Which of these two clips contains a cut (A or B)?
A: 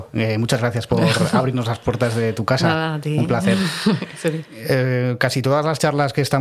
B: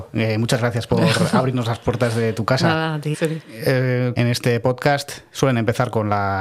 B